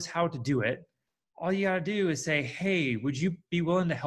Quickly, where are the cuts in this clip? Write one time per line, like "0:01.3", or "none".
none